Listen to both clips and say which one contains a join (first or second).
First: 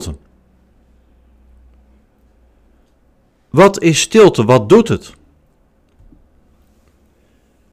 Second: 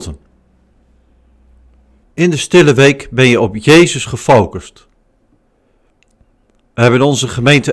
second